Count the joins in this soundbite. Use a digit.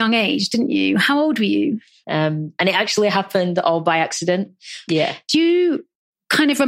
2